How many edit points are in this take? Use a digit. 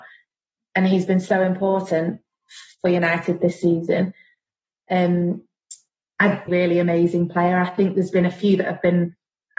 1